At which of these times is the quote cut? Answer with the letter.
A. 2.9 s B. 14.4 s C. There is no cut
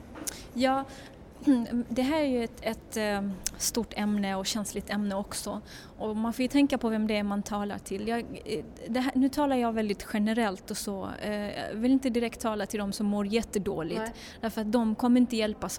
C